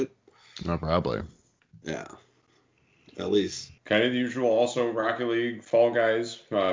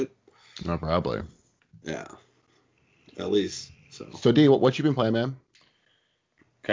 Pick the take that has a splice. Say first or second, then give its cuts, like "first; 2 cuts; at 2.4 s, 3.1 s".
first; 1 cut; at 3.8 s